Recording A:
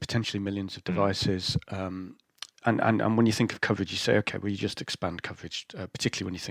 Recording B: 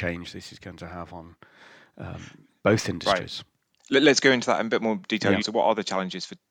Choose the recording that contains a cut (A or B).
B